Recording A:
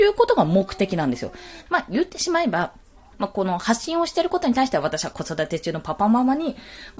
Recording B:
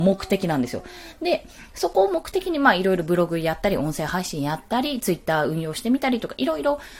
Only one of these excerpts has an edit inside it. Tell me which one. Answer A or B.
A